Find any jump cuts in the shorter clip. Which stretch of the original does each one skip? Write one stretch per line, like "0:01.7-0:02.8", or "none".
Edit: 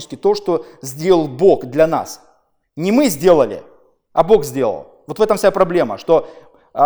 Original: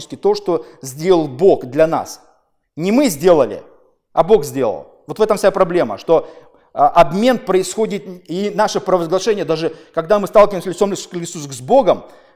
none